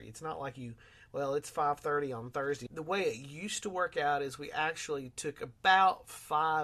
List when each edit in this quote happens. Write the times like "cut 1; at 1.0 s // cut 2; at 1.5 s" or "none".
cut 1; at 2.7 s